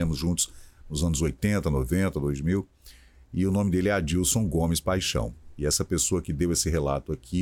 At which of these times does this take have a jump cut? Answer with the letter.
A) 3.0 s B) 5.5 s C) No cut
C